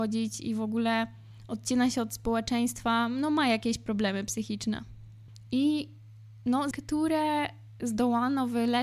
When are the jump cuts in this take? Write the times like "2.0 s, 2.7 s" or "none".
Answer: 5.5 s, 6.7 s